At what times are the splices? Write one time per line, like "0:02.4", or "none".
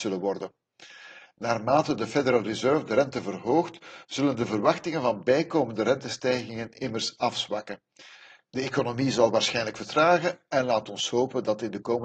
none